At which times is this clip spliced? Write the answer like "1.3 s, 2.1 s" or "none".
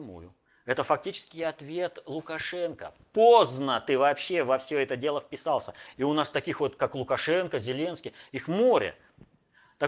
5.9 s